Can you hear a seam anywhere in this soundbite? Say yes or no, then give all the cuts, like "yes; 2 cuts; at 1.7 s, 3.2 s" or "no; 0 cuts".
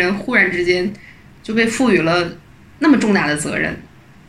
no; 0 cuts